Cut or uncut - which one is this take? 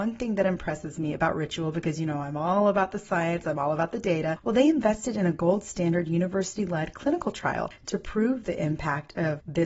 uncut